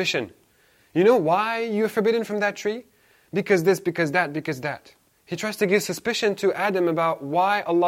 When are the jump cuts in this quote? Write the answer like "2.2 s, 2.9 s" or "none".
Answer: none

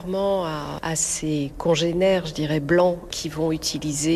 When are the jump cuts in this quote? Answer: none

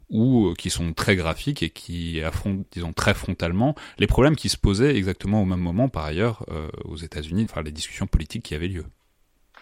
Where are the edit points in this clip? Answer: 7.5 s

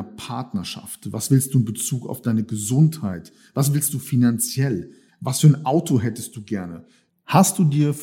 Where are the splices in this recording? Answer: 5.1 s, 7.1 s

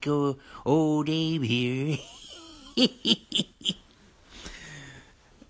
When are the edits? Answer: none

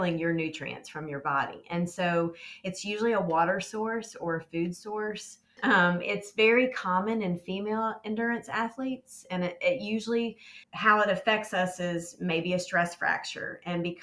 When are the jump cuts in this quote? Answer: 5.6 s, 10.6 s

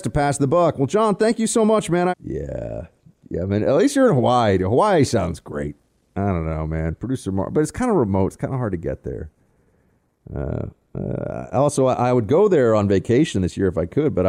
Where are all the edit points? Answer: 2.1 s

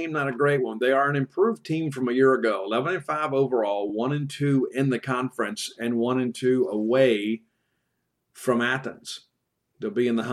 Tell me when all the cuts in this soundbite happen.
none

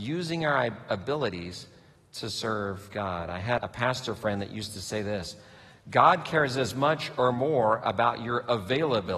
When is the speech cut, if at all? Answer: 3.6 s

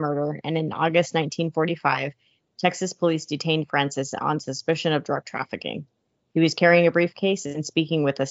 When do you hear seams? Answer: none

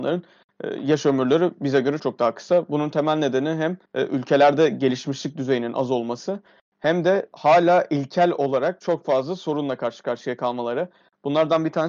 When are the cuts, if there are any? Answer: 2.0 s, 3.8 s

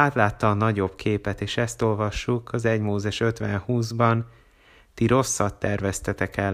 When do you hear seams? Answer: none

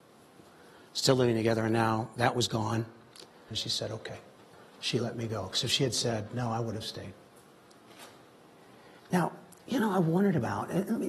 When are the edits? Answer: 3.5 s, 9.0 s

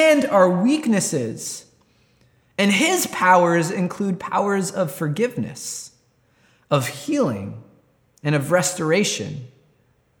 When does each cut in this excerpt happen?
none

